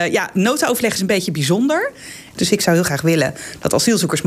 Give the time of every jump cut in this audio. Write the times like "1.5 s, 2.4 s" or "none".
2.3 s